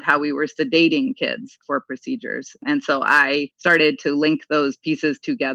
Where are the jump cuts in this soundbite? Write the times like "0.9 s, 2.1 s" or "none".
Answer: none